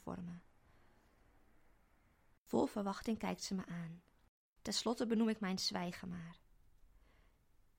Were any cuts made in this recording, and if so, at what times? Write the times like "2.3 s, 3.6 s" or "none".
2.4 s, 4.6 s